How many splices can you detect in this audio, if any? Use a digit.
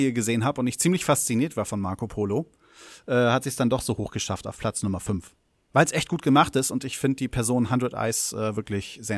0